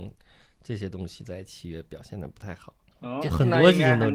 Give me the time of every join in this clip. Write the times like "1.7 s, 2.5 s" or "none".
3.2 s